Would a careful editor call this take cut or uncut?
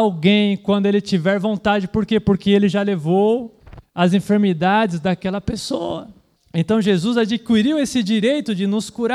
cut